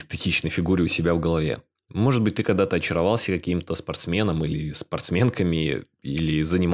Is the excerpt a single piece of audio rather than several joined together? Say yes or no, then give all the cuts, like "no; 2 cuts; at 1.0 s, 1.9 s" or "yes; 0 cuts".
yes; 0 cuts